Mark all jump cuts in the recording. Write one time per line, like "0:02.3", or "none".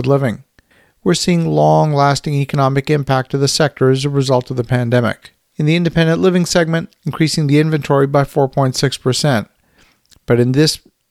0:07.0